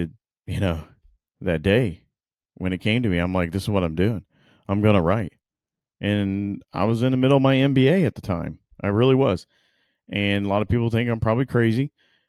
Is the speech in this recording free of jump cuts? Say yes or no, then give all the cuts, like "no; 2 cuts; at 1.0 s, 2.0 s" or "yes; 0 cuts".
yes; 0 cuts